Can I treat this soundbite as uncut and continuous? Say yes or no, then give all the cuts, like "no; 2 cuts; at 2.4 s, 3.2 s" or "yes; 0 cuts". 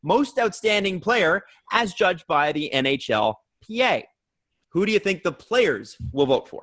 no; 1 cut; at 4.6 s